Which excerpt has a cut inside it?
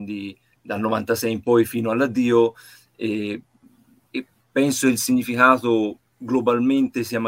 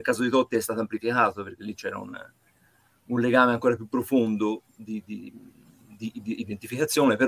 second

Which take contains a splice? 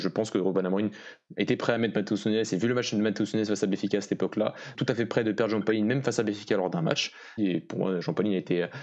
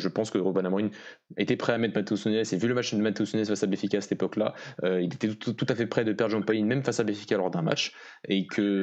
first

